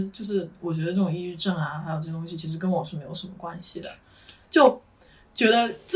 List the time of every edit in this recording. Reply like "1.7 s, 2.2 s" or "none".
none